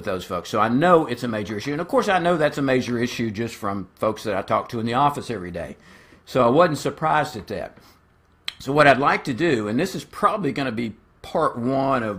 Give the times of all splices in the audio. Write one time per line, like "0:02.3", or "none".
none